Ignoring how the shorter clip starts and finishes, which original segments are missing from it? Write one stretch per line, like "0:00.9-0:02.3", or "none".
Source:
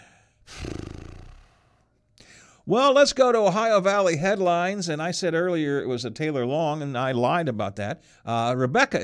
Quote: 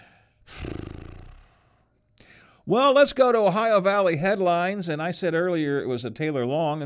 none